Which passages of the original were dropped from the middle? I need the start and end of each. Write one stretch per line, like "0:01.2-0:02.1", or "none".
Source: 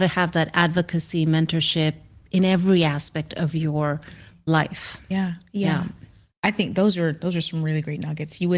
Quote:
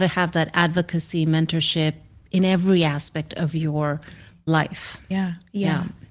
none